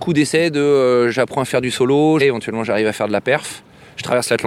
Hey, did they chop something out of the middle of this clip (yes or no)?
yes